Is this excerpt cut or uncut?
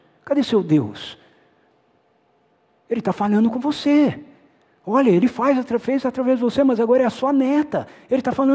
uncut